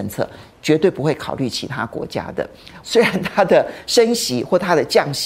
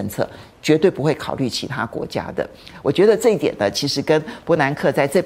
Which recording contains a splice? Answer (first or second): first